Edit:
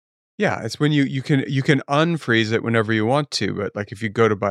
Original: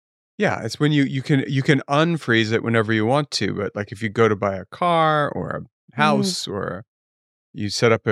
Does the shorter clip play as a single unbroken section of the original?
yes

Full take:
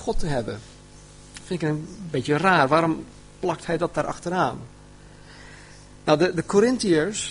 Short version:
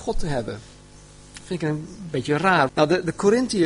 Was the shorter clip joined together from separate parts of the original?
yes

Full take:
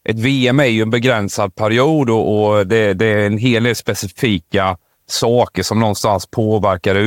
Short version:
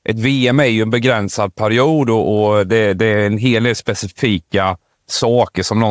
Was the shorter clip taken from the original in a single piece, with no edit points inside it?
yes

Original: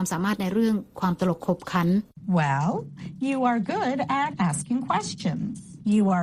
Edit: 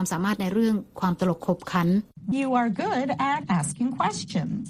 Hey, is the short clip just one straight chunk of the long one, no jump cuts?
no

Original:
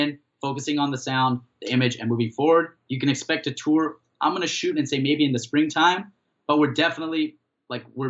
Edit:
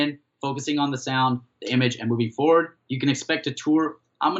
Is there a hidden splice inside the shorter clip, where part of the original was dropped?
no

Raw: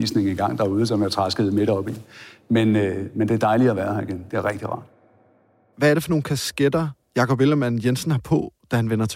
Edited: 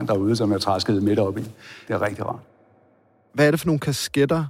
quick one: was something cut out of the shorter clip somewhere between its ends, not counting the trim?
yes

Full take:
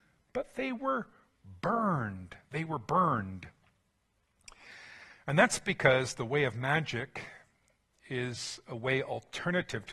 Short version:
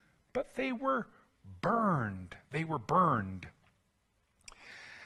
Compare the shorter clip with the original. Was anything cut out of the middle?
no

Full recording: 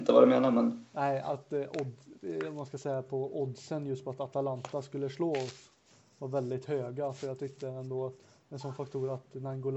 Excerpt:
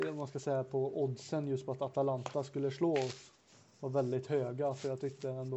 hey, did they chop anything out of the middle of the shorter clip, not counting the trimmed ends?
no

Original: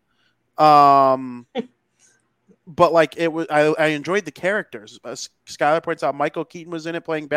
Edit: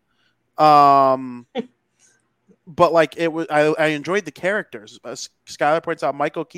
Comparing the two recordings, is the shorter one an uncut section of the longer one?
yes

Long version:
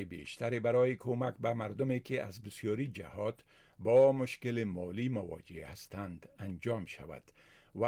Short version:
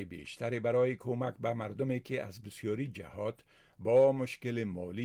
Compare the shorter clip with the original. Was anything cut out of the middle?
no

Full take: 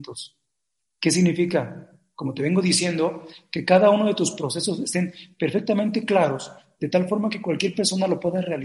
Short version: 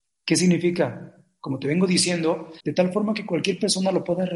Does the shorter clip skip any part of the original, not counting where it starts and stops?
yes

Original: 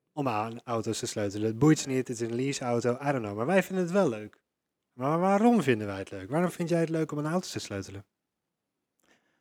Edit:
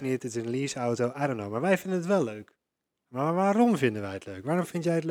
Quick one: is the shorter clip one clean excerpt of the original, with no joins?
yes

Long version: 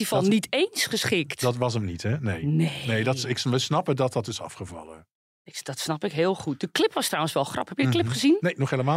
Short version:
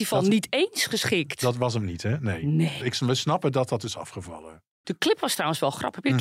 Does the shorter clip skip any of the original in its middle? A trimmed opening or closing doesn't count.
yes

